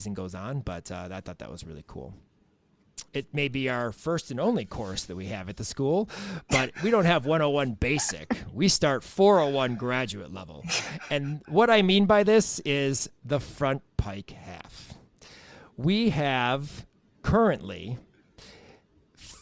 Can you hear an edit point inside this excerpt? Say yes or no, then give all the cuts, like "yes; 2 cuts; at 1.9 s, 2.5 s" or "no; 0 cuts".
yes; 1 cut; at 3.1 s